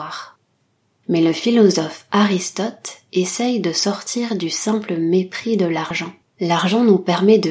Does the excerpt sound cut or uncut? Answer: cut